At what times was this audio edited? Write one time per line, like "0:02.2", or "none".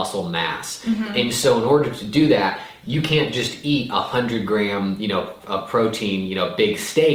0:05.4

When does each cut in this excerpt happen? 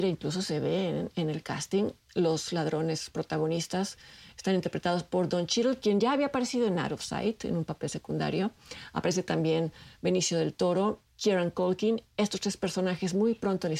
0:11.1

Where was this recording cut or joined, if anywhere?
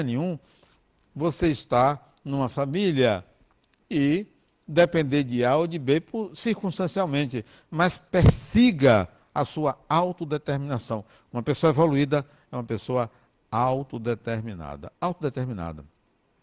none

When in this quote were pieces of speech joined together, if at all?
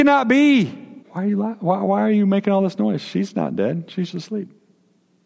0:01.0
0:04.1

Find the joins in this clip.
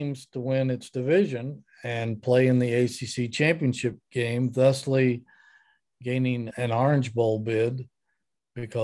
0:06.5

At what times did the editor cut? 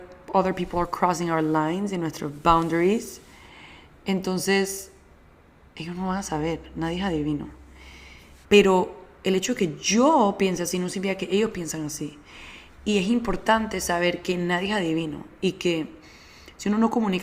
0:08.4

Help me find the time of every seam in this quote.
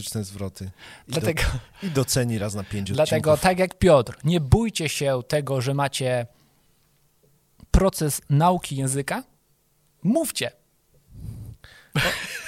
none

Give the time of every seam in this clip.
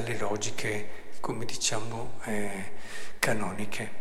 none

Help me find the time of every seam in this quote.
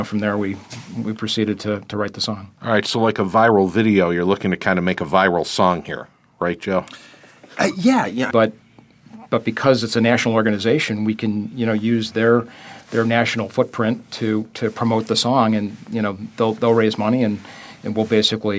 0:08.3

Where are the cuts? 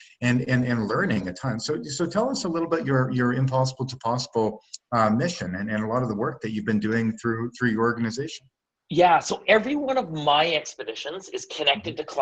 none

